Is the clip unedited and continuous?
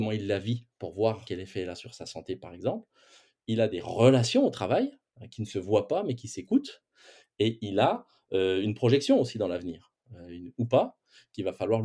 yes; 0 cuts

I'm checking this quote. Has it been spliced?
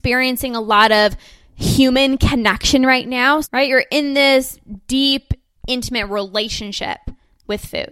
yes; 1 cut; at 3.4 s

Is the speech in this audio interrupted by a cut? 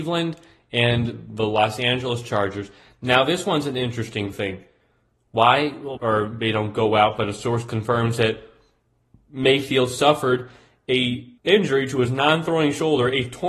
yes; 2 cuts; at 6.0 s, 11.4 s

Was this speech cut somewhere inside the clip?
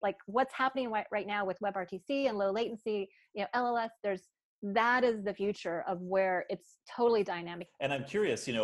yes; 1 cut; at 7.7 s

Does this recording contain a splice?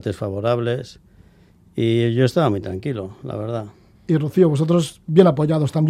yes; 1 cut; at 3.9 s

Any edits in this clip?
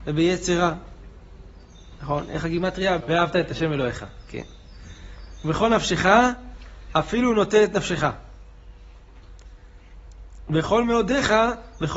yes; 1 cut; at 3.0 s

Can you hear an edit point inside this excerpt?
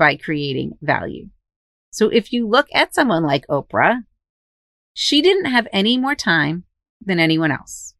no; 0 cuts

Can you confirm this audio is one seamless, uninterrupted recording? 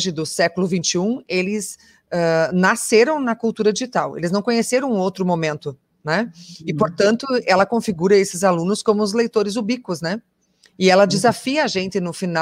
yes; 0 cuts

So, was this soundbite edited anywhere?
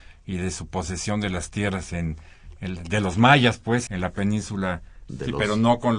yes; 2 cuts; at 3.9 s, 5.1 s

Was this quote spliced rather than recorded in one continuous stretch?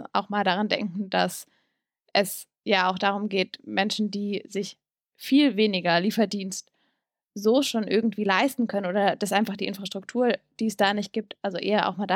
no; 0 cuts

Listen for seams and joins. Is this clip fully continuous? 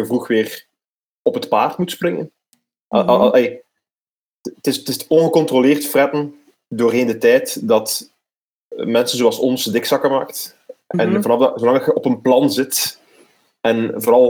yes; 0 cuts

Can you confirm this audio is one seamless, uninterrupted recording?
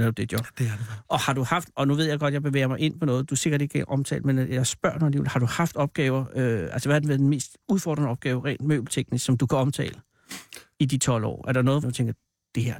no; 1 cut; at 11.8 s

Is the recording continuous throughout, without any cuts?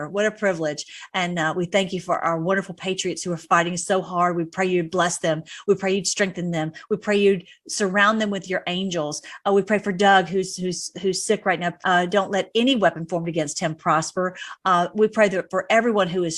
no; 1 cut; at 11.8 s

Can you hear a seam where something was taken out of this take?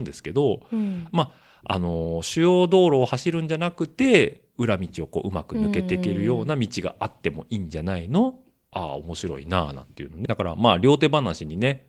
yes; 2 cuts; at 8.7 s, 10.3 s

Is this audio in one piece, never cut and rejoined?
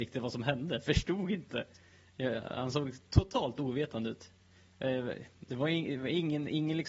yes; 0 cuts

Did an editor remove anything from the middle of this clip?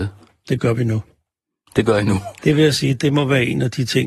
yes; 1 cut; at 2.4 s

